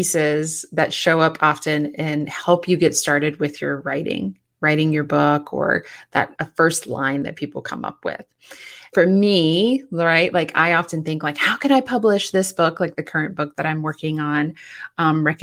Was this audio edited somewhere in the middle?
yes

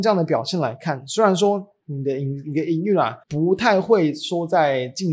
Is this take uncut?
no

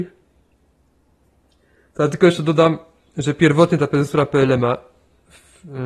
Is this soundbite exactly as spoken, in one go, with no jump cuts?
yes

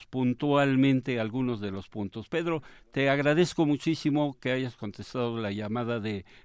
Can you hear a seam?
no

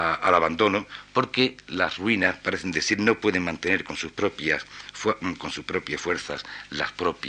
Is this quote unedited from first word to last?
yes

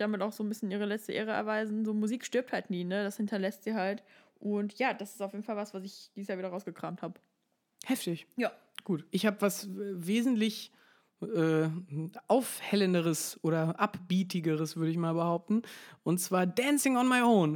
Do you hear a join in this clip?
no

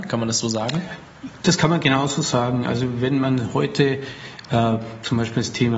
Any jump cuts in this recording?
no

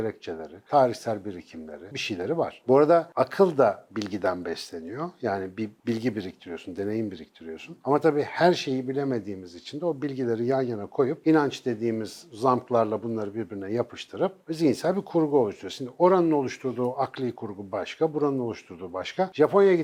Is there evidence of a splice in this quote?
yes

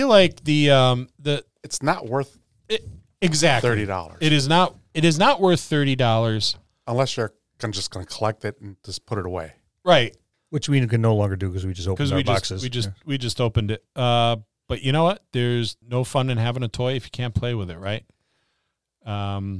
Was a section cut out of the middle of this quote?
no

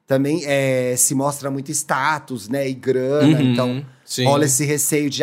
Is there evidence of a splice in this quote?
no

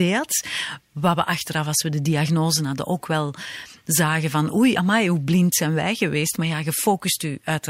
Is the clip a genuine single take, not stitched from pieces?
yes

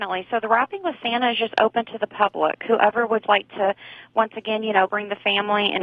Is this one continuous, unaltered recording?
no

